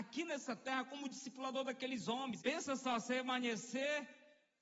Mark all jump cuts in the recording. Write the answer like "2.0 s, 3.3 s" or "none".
2.4 s